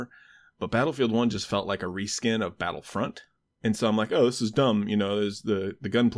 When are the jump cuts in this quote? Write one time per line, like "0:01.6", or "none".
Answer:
none